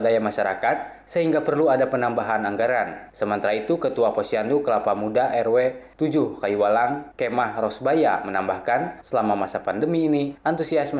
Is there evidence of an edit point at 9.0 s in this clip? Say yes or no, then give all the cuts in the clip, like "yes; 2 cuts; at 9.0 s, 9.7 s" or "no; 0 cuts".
no; 0 cuts